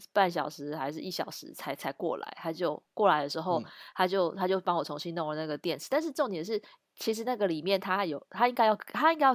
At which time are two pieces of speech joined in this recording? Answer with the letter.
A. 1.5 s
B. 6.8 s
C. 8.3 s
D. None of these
D